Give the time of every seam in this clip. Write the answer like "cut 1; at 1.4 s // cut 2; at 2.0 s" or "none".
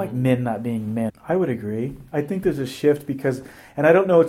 cut 1; at 1.1 s